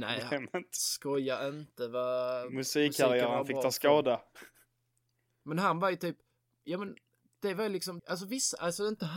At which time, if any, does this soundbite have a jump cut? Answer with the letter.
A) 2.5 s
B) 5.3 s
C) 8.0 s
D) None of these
C